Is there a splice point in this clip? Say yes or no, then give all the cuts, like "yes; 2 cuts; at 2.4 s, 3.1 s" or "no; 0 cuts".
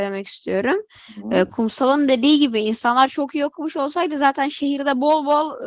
no; 0 cuts